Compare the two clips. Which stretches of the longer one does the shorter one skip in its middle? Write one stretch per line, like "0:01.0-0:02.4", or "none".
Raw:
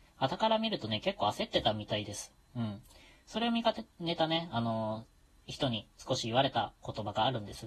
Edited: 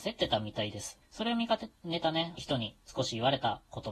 0:02.3-0:03.2
0:04.5-0:05.5